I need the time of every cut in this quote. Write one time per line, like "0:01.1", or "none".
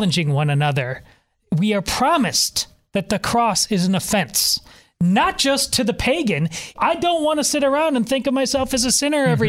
0:06.7

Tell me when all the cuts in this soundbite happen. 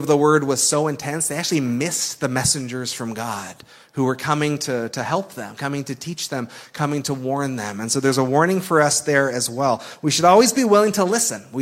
none

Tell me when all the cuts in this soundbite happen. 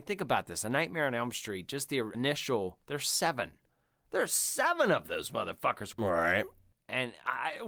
0:02.1
0:05.9

